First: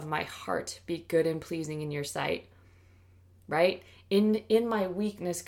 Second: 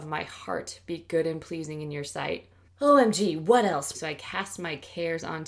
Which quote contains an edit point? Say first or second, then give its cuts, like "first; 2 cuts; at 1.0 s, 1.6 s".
second; 2 cuts; at 2.7 s, 3.9 s